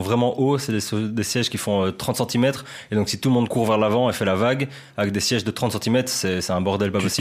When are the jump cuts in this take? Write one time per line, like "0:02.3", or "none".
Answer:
none